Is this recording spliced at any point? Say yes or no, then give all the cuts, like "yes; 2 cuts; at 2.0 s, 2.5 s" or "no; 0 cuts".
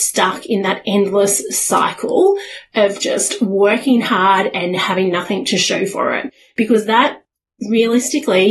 no; 0 cuts